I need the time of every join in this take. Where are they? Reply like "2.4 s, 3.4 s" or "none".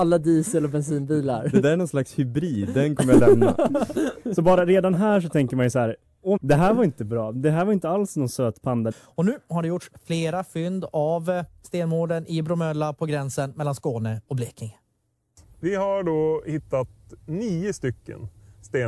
6.4 s, 8.9 s